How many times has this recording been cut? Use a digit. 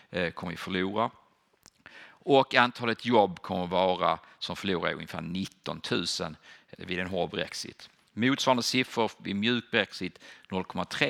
1